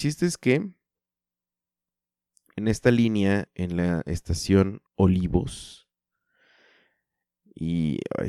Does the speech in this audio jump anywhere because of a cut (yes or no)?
yes